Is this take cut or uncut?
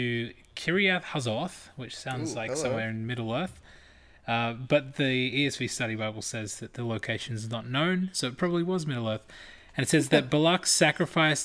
uncut